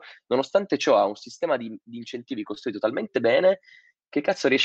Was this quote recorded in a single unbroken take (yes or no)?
yes